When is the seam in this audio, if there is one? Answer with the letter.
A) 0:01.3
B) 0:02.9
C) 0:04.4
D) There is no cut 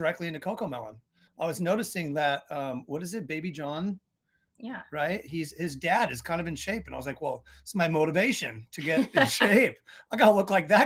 D